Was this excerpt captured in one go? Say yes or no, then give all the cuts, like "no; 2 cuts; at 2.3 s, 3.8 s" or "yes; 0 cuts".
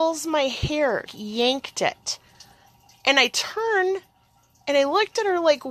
no; 1 cut; at 1.1 s